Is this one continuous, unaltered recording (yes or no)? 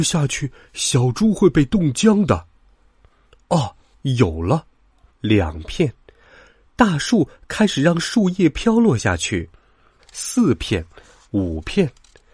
no